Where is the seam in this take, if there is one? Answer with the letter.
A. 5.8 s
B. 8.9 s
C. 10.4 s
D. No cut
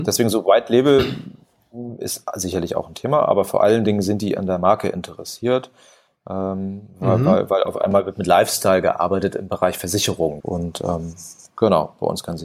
C